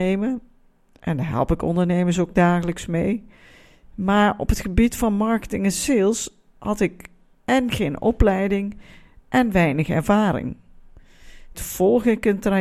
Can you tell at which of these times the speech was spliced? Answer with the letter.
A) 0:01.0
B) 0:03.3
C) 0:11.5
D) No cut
C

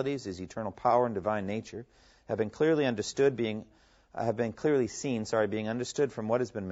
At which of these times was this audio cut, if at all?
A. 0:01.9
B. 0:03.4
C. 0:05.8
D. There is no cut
D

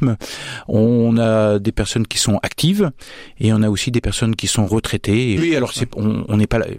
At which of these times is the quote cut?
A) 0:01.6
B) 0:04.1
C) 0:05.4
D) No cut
C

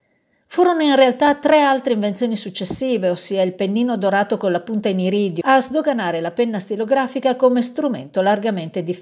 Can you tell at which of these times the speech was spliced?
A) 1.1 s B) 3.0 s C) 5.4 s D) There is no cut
C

